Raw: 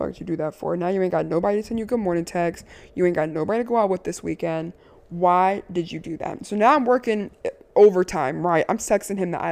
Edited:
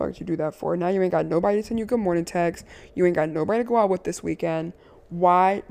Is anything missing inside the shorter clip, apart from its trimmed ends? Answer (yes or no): no